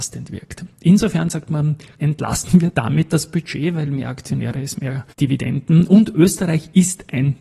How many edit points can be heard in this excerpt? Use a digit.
2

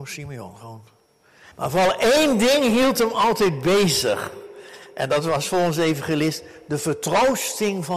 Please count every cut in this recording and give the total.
1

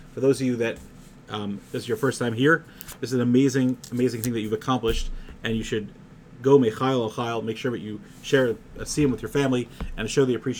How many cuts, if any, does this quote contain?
0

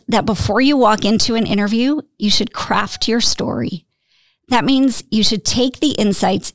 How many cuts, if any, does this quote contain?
0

